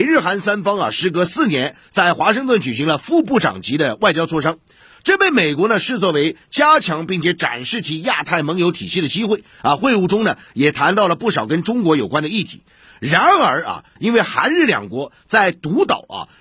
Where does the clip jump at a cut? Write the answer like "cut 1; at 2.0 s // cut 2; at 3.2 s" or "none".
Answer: cut 1; at 14.0 s